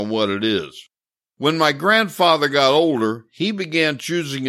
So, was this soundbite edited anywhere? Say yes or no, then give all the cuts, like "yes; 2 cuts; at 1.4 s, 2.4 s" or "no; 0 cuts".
no; 0 cuts